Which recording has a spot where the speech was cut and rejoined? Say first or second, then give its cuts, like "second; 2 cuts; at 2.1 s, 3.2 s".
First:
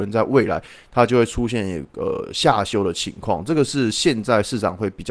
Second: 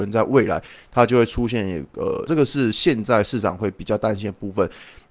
second; 1 cut; at 2.3 s